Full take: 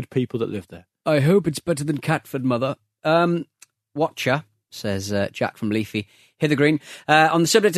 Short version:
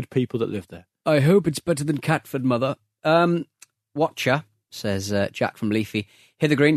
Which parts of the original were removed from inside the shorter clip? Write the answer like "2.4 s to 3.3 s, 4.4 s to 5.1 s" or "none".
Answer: none